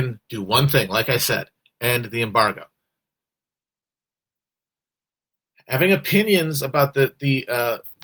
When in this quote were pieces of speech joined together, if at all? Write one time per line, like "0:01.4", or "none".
none